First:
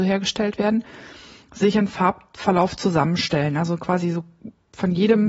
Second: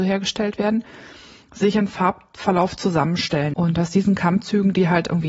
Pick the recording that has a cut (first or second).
second